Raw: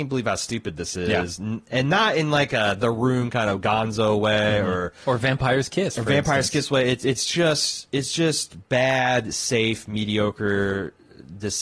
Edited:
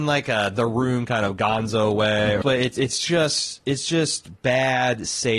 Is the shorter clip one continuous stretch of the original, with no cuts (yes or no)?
no